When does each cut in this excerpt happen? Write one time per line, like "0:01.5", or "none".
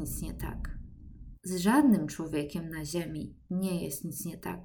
0:01.3